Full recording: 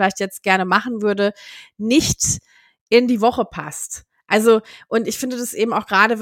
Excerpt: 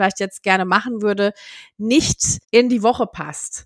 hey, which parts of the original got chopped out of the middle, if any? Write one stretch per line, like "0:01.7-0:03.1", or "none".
0:02.4-0:02.8